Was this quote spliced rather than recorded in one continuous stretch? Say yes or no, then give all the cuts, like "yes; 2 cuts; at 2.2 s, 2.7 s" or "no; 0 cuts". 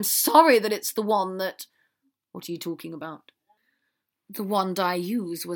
no; 0 cuts